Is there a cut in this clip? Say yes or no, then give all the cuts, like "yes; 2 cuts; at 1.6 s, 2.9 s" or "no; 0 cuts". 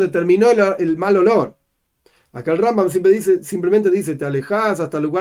no; 0 cuts